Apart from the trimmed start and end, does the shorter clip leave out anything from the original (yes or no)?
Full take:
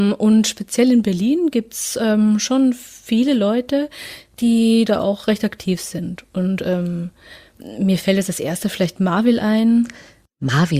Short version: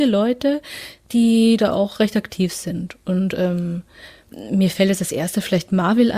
no